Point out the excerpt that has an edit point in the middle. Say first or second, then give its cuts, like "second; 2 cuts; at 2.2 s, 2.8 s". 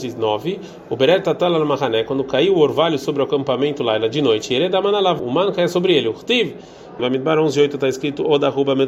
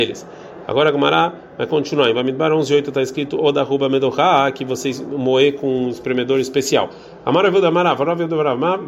first; 2 cuts; at 5.2 s, 7.0 s